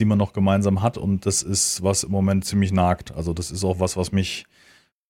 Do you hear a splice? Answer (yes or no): no